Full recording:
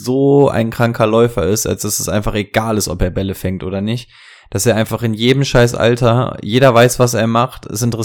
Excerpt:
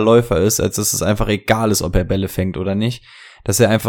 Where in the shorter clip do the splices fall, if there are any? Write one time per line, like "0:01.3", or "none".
none